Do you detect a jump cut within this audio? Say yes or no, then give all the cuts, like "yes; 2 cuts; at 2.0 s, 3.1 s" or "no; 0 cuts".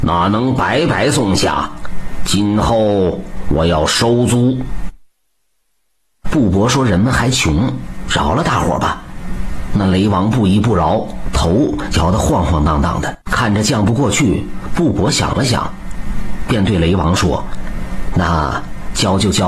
yes; 1 cut; at 13.2 s